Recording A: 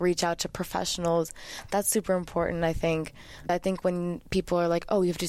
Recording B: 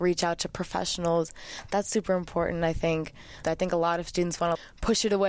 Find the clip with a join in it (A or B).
B